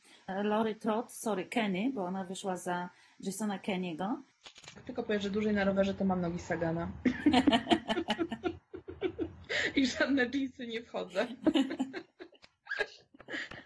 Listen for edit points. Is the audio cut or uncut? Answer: cut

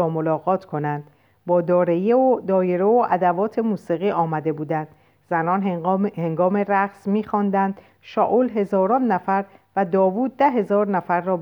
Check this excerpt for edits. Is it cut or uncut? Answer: uncut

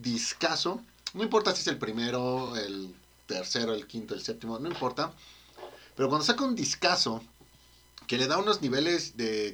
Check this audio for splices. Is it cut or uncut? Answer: uncut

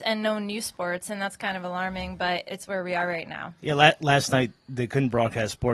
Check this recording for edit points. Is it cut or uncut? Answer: uncut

